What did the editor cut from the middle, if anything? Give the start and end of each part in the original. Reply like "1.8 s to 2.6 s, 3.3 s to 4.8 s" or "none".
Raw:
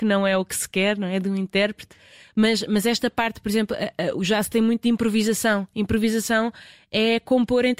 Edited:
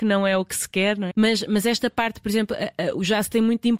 1.1 s to 2.3 s